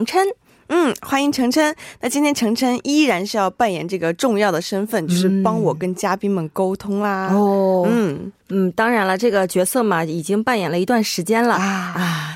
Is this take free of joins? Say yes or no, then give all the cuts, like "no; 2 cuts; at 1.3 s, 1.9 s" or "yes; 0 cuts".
no; 1 cut; at 8.4 s